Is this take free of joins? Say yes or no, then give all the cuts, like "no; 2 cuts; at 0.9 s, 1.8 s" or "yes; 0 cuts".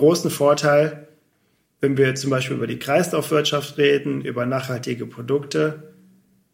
yes; 0 cuts